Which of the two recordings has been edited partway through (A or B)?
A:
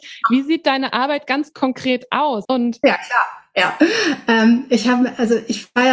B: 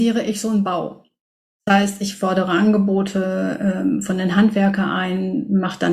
A